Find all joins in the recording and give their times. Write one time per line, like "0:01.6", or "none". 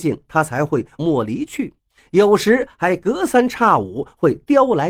0:01.0